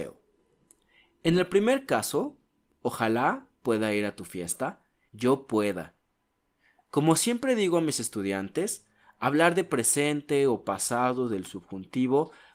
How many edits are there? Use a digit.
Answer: 1